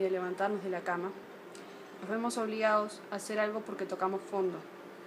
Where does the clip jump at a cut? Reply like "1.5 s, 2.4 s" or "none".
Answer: 2.0 s